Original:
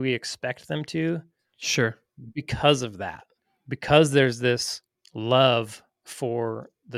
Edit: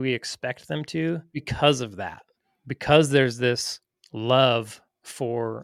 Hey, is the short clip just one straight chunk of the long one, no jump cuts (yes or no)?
no